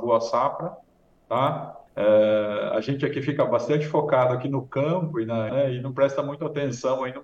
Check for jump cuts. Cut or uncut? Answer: cut